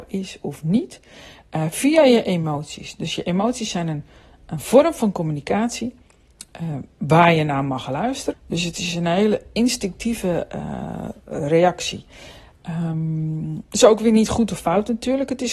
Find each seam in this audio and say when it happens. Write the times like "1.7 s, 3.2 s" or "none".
8.3 s, 13.7 s